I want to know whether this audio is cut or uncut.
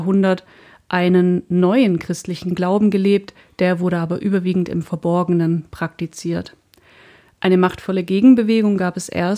uncut